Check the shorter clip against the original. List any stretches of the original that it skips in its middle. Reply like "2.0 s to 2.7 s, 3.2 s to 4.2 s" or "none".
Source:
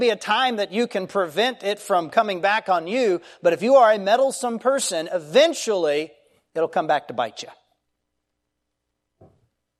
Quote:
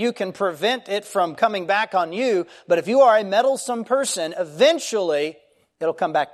none